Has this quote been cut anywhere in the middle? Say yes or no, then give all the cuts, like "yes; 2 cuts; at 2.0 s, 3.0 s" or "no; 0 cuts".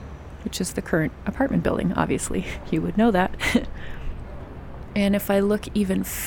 no; 0 cuts